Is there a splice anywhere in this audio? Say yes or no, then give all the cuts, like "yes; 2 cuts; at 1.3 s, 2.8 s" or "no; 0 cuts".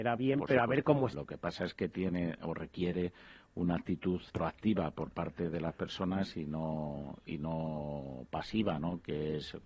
yes; 2 cuts; at 1.1 s, 4.3 s